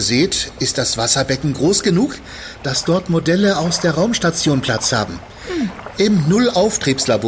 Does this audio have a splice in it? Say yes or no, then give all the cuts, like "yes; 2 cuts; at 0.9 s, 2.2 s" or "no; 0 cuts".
yes; 1 cut; at 5.9 s